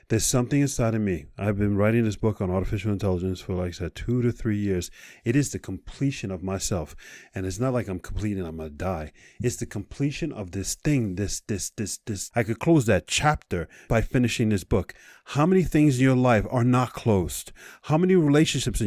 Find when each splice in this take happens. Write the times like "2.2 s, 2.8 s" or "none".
12.3 s, 13.9 s